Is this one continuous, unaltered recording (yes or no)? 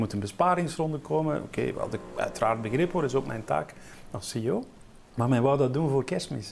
no